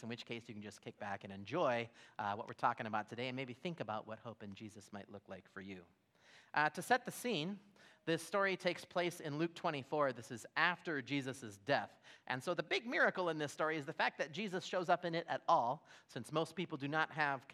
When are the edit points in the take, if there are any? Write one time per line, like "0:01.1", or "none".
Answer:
none